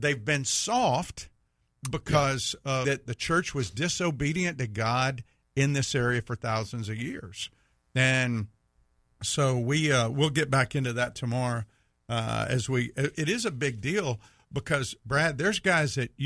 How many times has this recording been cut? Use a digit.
2